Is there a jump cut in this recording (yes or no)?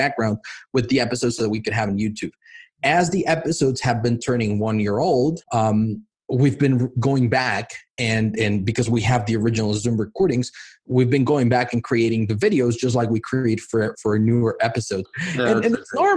yes